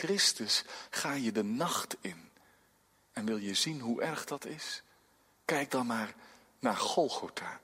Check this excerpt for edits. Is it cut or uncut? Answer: uncut